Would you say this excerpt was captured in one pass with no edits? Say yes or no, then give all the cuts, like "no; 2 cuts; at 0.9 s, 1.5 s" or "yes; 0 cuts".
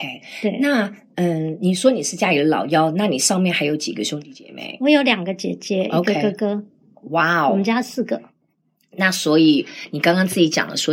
yes; 0 cuts